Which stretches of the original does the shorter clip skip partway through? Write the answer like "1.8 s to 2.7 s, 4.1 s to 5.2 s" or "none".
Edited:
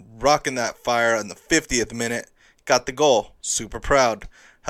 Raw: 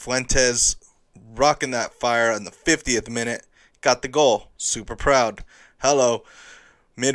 none

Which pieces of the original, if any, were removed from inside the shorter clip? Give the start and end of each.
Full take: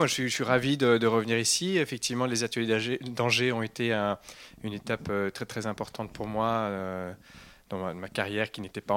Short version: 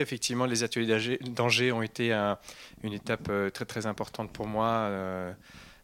none

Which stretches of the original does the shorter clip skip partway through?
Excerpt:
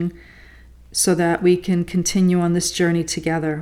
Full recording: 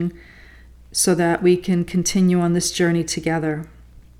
none

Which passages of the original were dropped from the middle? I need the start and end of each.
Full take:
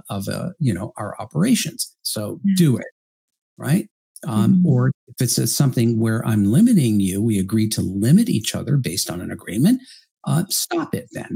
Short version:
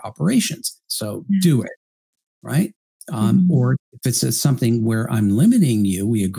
none

